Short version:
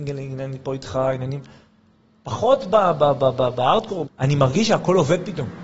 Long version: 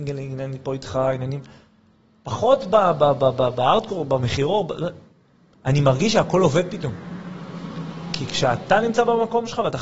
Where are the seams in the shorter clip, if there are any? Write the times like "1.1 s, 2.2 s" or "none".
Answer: 4.1 s